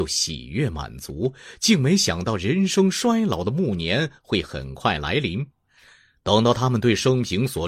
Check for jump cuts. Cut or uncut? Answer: uncut